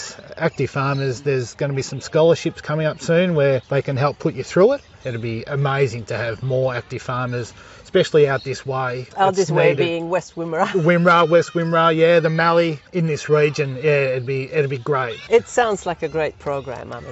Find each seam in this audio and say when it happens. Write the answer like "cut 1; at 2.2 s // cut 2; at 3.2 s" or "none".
none